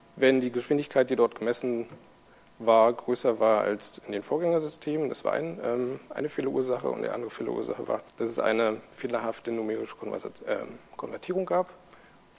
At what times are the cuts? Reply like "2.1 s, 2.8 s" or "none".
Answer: 8.1 s